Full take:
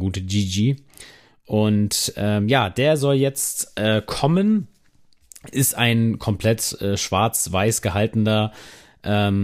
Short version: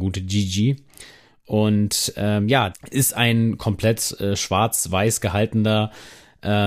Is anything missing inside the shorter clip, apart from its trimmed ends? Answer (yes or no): yes